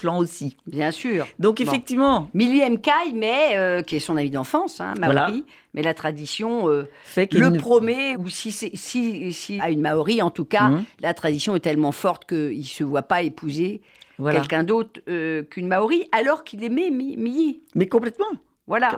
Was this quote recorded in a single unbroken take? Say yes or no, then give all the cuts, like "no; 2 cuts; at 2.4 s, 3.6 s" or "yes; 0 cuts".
no; 2 cuts; at 8.1 s, 9.6 s